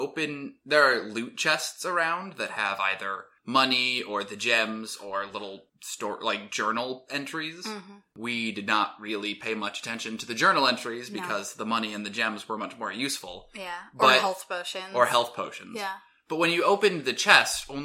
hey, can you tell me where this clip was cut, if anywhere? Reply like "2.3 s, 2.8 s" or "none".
none